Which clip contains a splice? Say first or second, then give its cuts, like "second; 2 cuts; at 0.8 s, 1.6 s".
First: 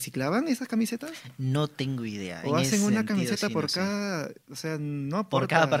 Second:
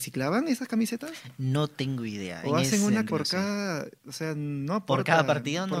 second; 1 cut; at 3.1 s